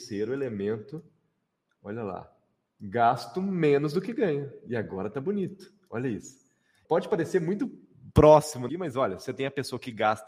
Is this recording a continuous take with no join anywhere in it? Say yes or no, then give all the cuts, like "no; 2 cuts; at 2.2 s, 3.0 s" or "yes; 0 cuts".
no; 2 cuts; at 6.8 s, 8.7 s